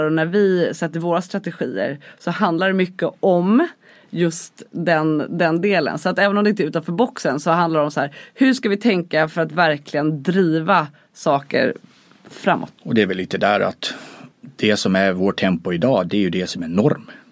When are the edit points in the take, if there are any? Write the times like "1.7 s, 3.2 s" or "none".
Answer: 12.7 s, 14.3 s